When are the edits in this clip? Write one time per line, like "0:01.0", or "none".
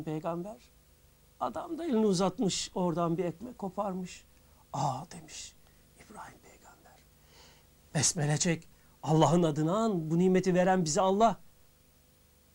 none